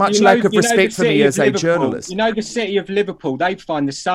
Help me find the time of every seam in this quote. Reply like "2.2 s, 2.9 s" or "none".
none